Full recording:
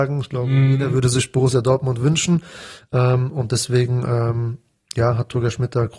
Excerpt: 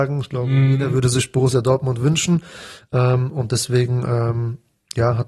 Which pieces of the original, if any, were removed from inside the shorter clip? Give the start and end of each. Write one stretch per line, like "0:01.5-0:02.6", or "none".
none